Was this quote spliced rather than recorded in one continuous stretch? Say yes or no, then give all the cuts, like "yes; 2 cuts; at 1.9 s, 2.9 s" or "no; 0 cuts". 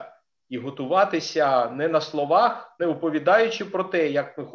yes; 1 cut; at 2.8 s